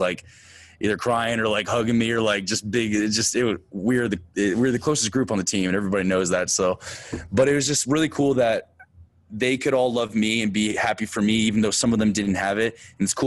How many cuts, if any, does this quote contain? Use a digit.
0